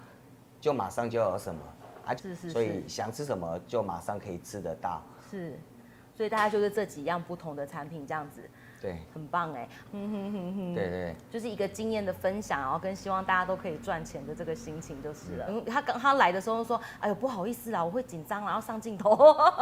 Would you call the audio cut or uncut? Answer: cut